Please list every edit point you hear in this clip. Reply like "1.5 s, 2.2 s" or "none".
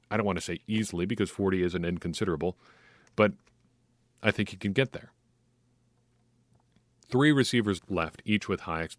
7.8 s